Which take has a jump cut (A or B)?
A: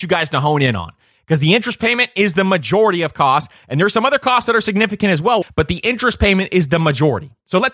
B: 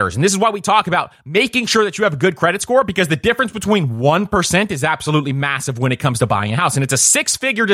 A